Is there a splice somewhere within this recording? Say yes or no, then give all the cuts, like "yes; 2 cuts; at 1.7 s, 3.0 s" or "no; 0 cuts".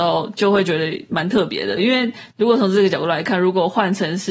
yes; 1 cut; at 1.8 s